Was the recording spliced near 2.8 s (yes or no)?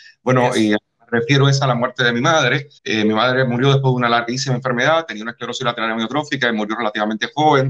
yes